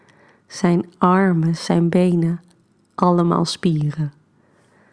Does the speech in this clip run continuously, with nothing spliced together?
no; 1 cut; at 1.6 s

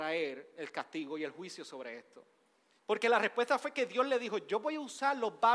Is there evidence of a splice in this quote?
yes; 1 cut; at 2.8 s

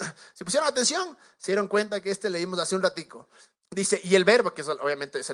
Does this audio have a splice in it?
yes; 1 cut; at 3.6 s

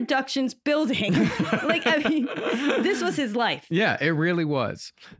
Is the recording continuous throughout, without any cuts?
yes; 0 cuts

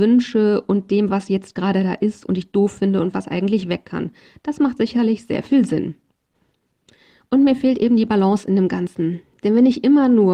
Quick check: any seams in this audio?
no; 0 cuts

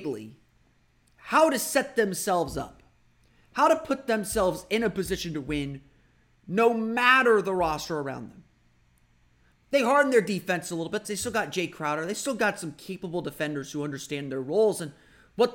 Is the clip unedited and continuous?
no; 2 cuts; at 9.5 s, 11.0 s

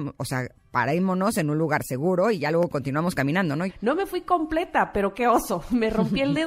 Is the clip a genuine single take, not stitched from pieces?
no; 1 cut; at 3.7 s

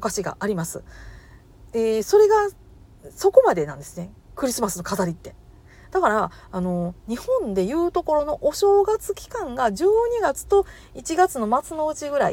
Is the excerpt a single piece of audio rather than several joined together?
yes; 0 cuts

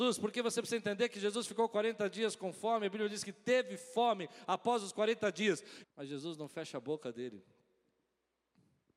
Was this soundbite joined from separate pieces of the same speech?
yes; 1 cut; at 5.8 s

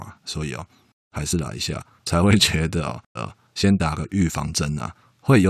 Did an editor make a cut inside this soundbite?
yes; 1 cut; at 3.2 s

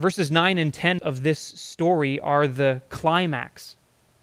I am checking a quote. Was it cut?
yes; 1 cut; at 1.0 s

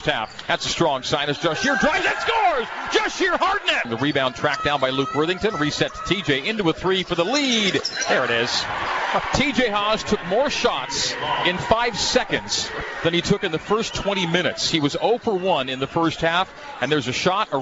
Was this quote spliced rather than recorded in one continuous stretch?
yes; 1 cut; at 3.8 s

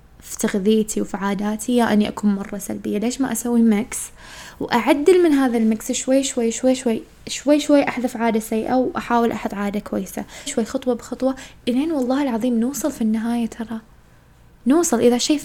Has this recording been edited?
yes; 1 cut; at 10.5 s

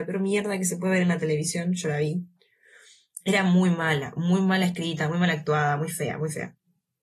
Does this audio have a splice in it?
no; 0 cuts

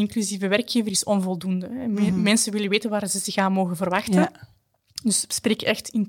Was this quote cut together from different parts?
no; 0 cuts

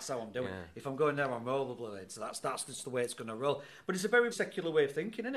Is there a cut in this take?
yes; 1 cut; at 4.3 s

